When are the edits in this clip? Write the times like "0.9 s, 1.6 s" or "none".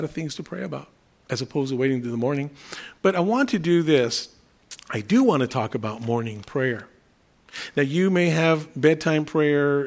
none